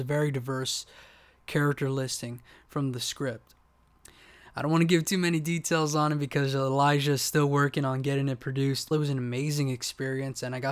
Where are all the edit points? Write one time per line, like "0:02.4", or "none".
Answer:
0:08.9